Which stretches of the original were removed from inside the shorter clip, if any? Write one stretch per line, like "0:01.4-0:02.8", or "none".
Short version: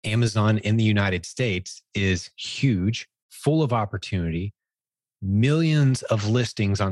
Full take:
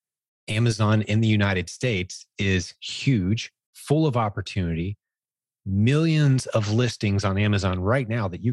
none

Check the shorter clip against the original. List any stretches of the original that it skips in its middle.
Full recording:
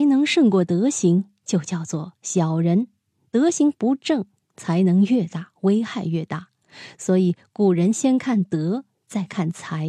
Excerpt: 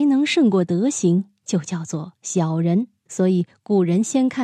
0:03.1-0:06.9

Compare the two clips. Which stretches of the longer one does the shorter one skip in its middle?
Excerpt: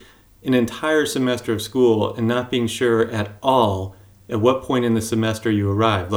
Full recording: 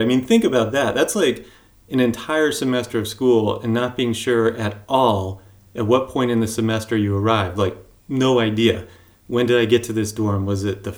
none

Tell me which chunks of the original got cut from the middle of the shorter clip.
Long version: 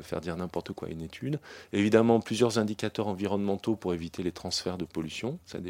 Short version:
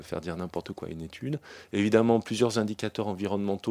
none

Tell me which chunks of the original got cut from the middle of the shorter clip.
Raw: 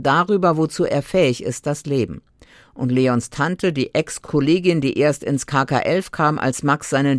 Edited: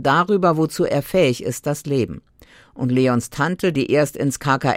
0:03.7-0:04.8

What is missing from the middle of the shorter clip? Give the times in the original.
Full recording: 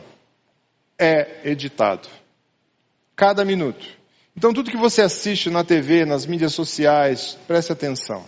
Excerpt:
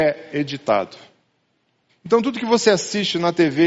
0:03.0-0:04.2

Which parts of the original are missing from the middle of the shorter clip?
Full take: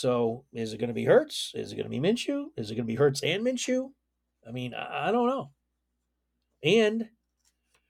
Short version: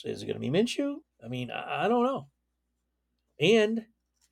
0:02.5-0:04.3

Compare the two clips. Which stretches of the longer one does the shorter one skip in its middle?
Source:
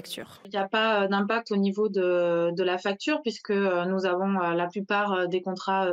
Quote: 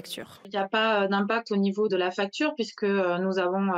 0:01.9-0:02.6

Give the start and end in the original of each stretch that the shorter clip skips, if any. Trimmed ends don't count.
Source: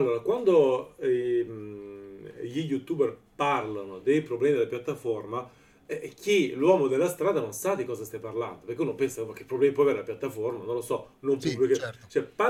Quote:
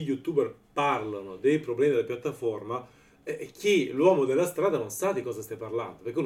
none

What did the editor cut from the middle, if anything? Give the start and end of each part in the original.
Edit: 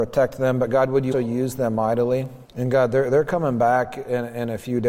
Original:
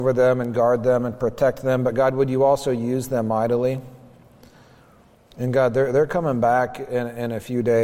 0:02.4-0:02.6
0:04.0-0:05.3

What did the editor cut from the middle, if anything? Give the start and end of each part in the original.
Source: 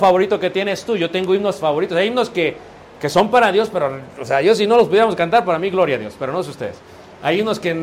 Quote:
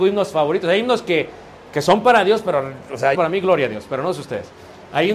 0:04.4-0:05.4

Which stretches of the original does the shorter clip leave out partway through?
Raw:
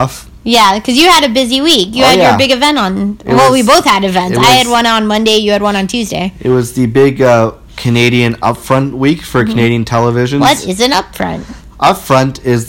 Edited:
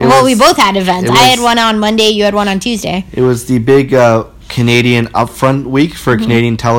none

